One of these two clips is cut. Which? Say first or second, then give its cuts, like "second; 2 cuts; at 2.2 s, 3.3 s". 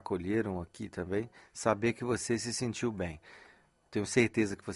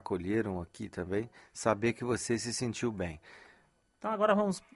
second; 1 cut; at 3.8 s